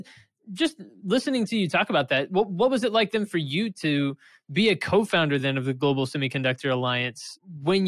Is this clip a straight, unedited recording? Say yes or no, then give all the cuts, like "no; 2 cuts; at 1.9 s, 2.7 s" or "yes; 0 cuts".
yes; 0 cuts